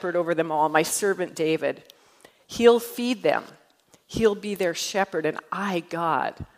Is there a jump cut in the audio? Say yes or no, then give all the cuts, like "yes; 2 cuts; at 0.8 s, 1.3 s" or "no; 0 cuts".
no; 0 cuts